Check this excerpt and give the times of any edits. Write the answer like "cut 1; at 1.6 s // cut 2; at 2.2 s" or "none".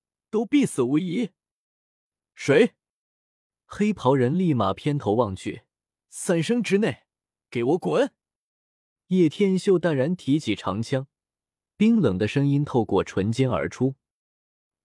cut 1; at 2.2 s // cut 2; at 6.0 s